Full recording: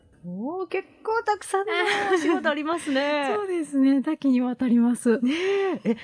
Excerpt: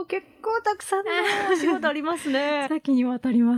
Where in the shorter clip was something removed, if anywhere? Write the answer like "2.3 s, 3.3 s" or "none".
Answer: 2.7 s